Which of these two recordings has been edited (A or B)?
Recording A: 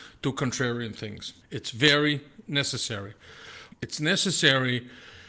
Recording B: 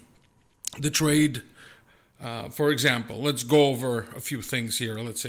A